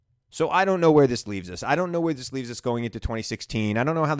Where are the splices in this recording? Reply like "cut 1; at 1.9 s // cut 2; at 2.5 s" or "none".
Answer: none